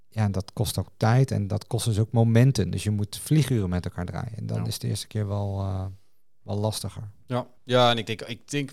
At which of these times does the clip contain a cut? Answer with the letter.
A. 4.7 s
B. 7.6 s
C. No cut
B